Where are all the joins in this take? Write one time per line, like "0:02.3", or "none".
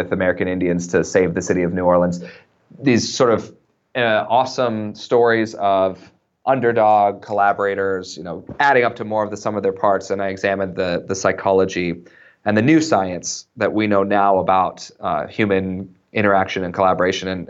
none